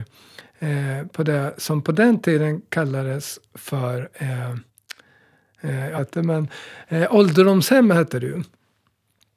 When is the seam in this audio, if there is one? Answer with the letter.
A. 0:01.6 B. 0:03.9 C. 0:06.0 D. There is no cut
C